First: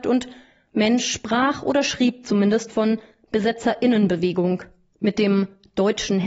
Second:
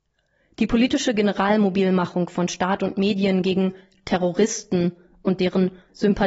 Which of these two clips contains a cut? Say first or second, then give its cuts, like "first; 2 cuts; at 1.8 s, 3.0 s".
first; 1 cut; at 4.9 s